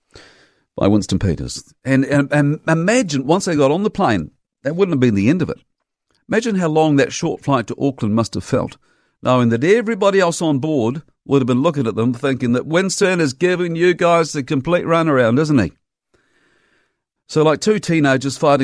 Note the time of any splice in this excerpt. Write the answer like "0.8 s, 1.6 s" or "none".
17.2 s